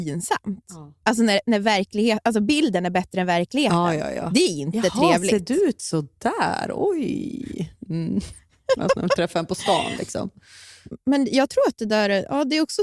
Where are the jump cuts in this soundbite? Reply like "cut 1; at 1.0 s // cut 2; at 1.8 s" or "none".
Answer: none